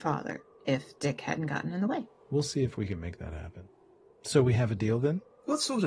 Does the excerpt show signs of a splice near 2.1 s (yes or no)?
no